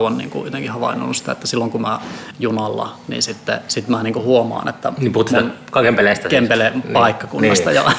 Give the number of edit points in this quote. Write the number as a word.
one